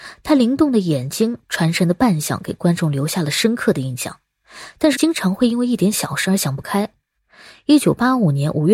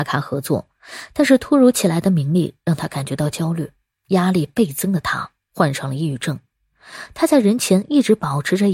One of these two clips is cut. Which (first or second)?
first